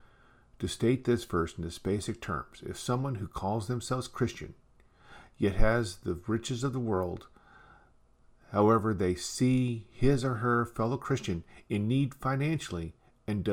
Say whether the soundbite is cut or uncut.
uncut